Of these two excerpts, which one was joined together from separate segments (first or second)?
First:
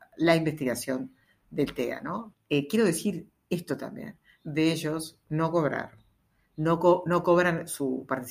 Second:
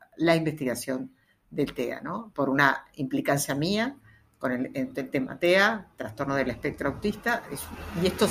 first